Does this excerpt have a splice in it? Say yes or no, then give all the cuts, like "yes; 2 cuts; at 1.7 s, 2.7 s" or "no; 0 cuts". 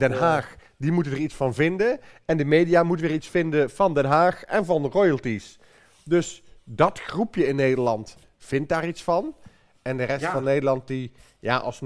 no; 0 cuts